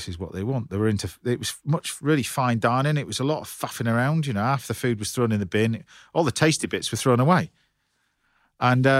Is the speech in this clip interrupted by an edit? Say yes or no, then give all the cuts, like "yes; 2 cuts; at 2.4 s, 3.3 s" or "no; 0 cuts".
no; 0 cuts